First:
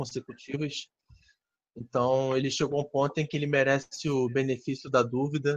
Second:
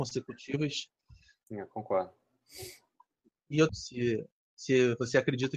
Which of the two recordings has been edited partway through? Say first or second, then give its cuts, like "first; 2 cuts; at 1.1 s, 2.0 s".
second; 2 cuts; at 1.4 s, 3.7 s